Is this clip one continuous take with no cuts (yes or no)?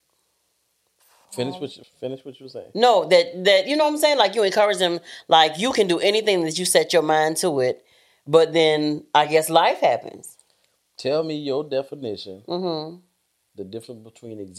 no